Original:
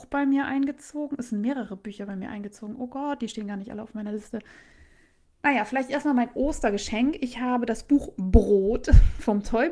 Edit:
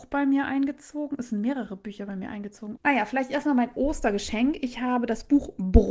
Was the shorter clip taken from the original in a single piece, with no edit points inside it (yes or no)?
no